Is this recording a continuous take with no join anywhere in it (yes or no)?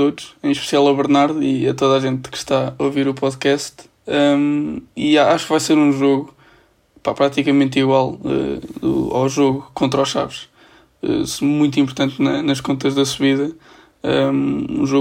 yes